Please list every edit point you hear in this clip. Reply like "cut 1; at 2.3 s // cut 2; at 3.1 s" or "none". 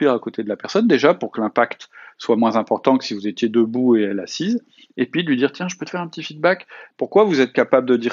cut 1; at 6.9 s